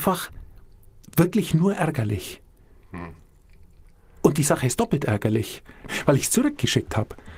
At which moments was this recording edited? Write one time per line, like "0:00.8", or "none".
0:05.9

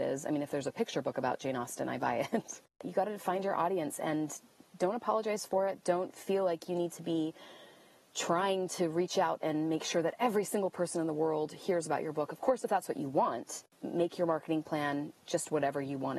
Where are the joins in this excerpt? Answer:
none

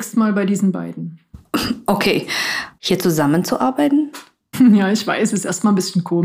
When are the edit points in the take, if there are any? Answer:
0:02.8
0:04.5

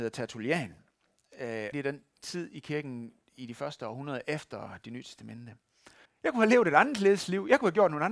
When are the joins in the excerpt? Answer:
0:01.7
0:06.1

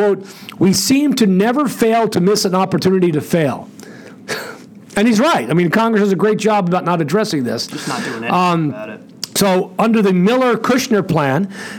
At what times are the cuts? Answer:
none

